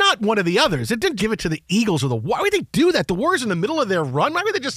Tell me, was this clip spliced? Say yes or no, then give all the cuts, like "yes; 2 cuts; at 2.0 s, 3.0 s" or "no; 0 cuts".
yes; 1 cut; at 1.2 s